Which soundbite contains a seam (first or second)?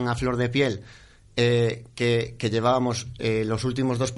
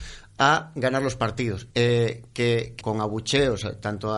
second